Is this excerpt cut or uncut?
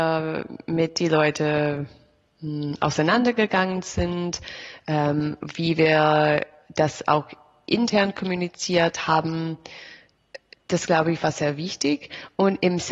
uncut